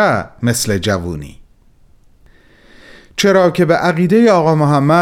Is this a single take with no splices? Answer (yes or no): yes